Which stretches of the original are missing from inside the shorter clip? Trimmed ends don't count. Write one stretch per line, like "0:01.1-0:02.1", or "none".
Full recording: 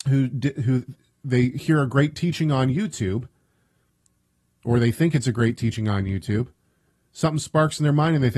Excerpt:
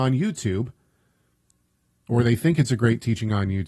none